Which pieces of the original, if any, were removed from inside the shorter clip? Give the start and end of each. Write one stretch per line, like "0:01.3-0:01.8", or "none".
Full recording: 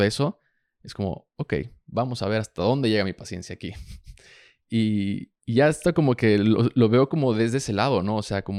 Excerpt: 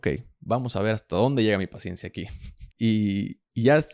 0:04.2-0:04.6